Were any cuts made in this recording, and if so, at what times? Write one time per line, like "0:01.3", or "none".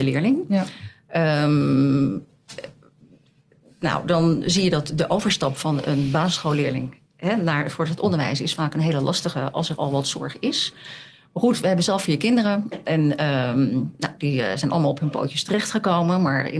none